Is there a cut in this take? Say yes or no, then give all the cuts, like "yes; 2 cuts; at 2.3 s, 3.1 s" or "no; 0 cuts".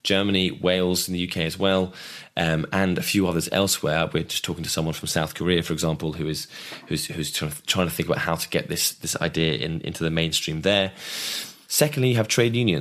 no; 0 cuts